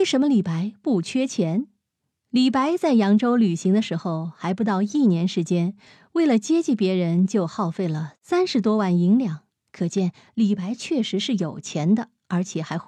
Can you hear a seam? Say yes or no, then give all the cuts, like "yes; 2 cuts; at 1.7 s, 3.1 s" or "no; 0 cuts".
no; 0 cuts